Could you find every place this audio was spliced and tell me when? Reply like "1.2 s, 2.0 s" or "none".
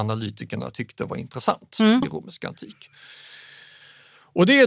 2.0 s

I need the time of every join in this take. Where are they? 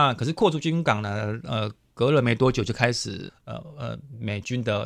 3.3 s

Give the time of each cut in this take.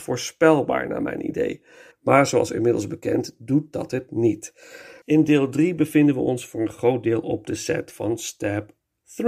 1.9 s, 5.0 s

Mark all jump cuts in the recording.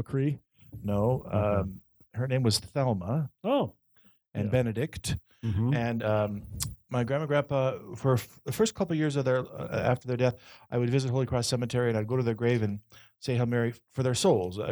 none

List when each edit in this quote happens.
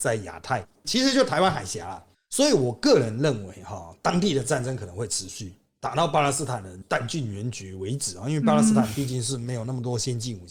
none

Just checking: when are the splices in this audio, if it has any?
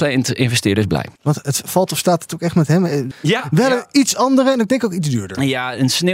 1.2 s, 3.1 s

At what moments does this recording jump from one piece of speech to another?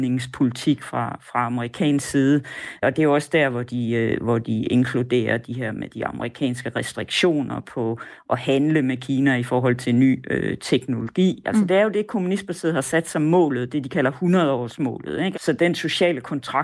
15.3 s

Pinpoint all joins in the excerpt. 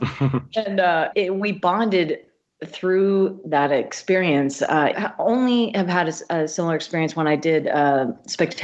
1.1 s, 4.9 s

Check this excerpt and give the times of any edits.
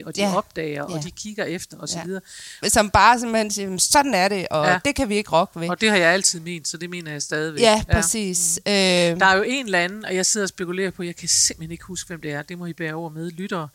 2.6 s

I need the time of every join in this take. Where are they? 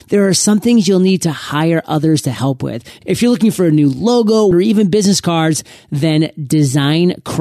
3.0 s, 4.5 s

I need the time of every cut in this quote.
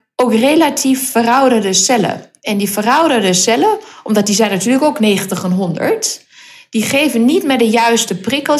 none

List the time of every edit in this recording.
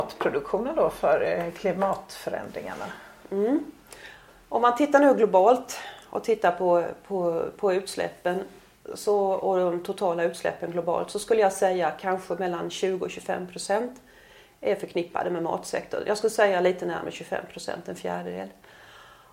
none

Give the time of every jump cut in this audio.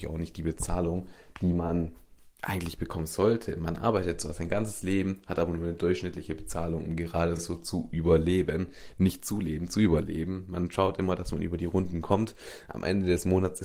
none

